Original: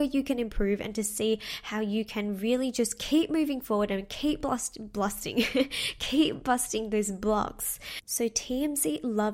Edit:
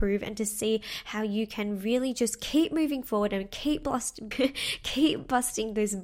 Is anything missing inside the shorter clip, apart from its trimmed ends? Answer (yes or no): yes